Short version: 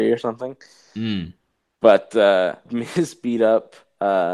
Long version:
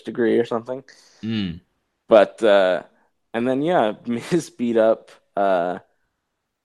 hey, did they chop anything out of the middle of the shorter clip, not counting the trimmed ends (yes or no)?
yes